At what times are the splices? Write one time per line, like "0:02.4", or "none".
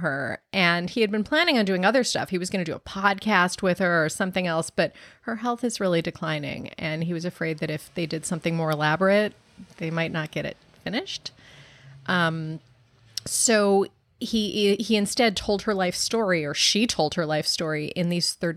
none